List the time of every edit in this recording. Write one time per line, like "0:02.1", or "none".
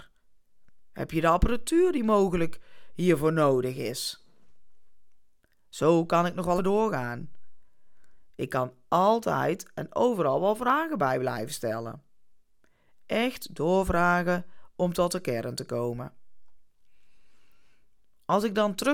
0:06.6